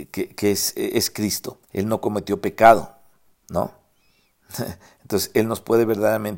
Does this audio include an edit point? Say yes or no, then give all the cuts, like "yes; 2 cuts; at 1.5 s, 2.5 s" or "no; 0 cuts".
yes; 1 cut; at 1.6 s